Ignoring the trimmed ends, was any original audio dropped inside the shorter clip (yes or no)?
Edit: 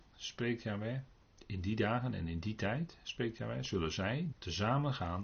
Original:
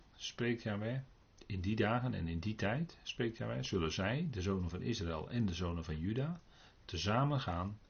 yes